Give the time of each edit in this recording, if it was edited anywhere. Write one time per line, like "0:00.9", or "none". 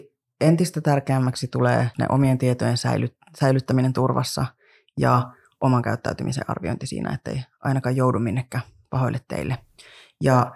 0:01.9

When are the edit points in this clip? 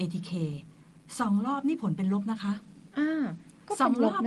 0:02.9

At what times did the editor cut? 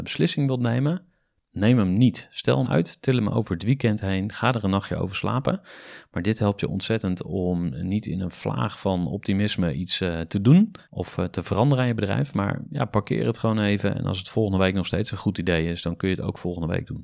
0:02.6
0:10.8

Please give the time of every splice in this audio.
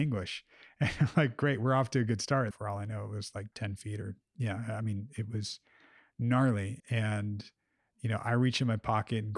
0:02.5
0:06.8

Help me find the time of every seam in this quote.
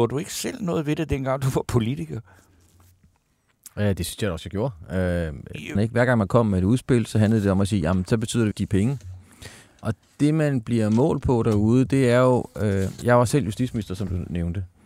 0:05.7
0:08.5

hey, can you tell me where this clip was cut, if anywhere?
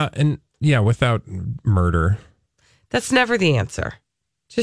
none

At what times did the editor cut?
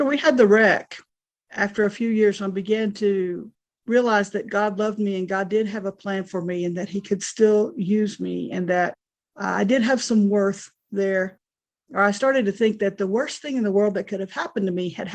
none

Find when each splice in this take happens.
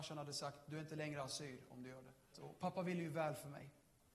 0:02.3

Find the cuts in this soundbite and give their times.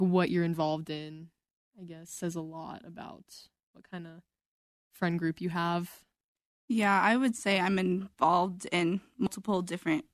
none

